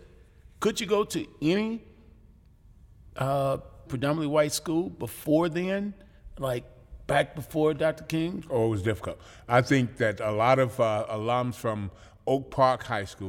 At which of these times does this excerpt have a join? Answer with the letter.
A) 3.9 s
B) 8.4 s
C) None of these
A